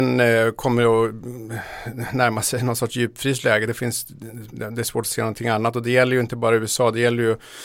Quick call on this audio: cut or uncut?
uncut